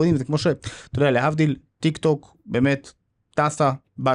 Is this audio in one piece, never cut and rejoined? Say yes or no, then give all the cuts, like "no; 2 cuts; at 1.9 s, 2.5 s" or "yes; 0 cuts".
yes; 0 cuts